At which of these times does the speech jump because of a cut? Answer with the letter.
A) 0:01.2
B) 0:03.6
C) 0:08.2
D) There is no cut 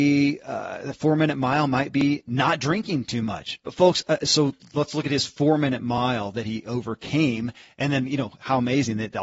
B